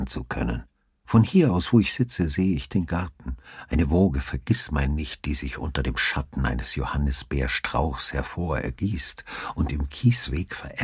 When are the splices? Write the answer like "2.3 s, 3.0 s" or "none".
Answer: 1.0 s